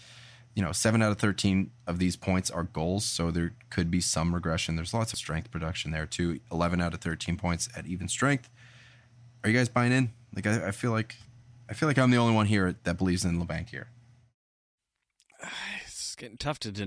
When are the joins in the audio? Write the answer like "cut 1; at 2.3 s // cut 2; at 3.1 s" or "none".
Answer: cut 1; at 5.1 s